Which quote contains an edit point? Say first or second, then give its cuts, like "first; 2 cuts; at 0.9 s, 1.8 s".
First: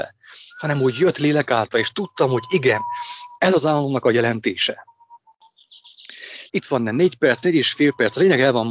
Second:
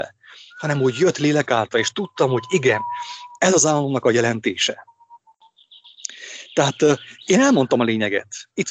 first; 1 cut; at 6.5 s